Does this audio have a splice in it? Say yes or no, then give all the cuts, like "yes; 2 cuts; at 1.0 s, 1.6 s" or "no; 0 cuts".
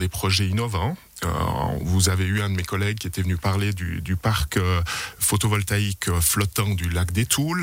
no; 0 cuts